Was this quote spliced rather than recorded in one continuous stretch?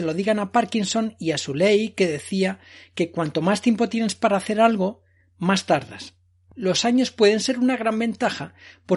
no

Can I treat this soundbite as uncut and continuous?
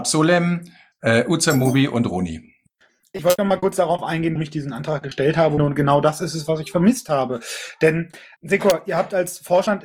no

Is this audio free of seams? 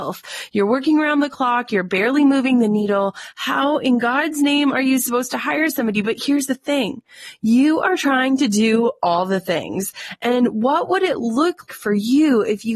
no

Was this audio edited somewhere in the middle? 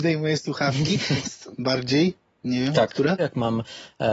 yes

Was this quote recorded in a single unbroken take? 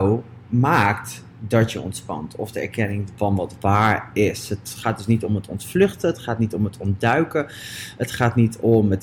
yes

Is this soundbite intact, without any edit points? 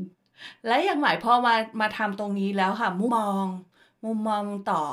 no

